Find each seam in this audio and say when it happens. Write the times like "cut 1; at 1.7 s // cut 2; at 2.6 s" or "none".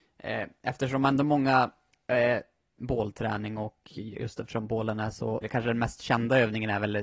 cut 1; at 2.8 s // cut 2; at 5.4 s